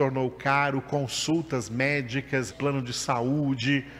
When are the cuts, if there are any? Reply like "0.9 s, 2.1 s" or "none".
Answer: 2.5 s

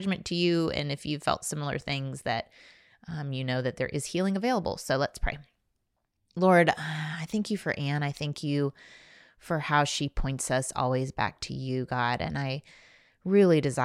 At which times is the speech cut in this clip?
none

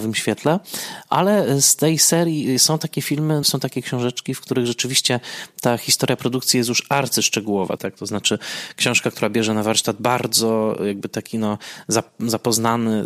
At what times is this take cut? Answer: 3.4 s, 7.8 s

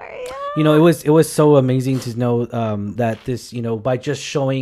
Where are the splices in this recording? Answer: none

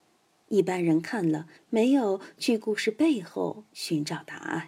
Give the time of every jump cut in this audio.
1.5 s

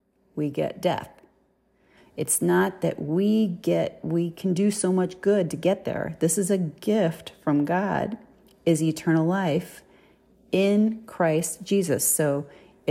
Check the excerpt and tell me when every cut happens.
2.0 s

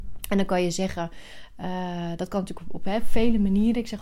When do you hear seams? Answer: none

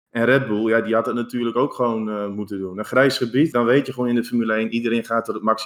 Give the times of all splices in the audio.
3.5 s

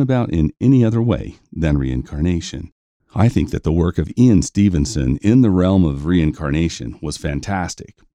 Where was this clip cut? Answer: 3.0 s

